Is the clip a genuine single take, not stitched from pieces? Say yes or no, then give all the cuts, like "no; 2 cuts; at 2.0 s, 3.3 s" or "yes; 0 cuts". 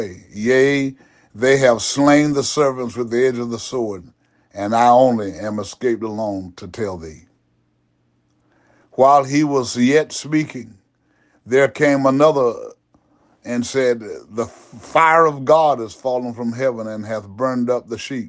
yes; 0 cuts